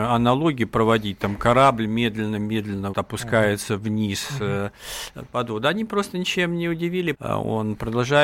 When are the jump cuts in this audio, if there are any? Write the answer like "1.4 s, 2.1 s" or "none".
2.9 s, 7.1 s